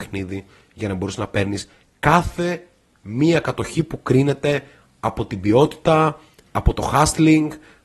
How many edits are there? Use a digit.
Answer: 0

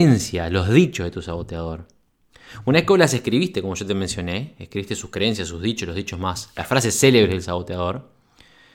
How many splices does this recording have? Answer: 0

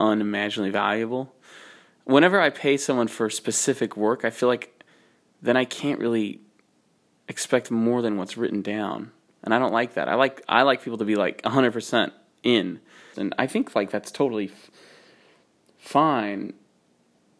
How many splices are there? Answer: 1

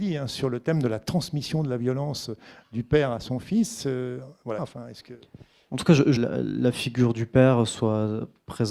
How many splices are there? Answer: 2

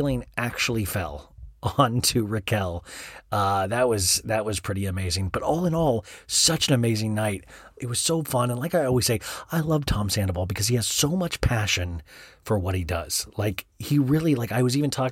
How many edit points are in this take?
1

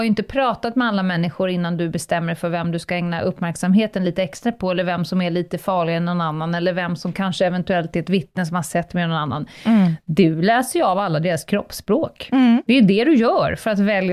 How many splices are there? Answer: 0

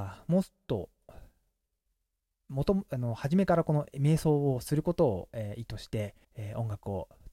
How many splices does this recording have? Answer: 1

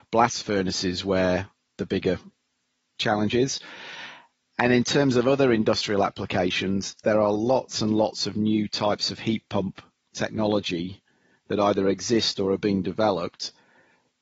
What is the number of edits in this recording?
0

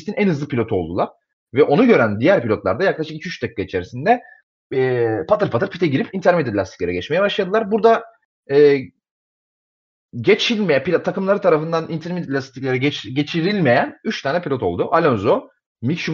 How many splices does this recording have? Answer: 0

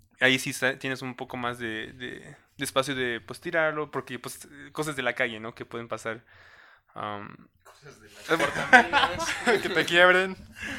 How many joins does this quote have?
1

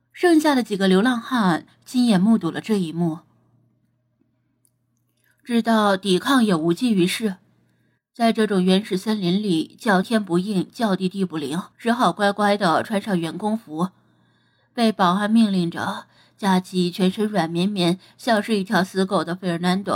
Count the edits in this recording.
2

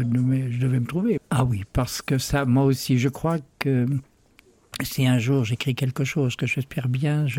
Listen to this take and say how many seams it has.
1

